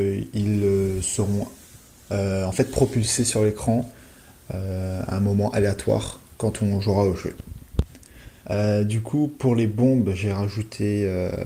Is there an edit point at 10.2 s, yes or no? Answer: no